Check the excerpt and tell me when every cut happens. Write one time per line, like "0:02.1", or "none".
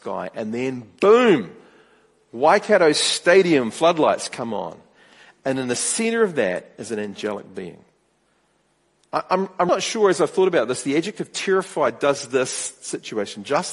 0:09.7